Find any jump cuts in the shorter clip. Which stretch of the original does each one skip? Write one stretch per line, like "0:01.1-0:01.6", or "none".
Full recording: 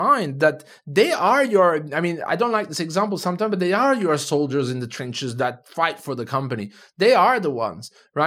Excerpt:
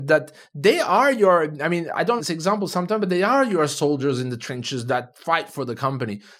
0:02.5-0:02.7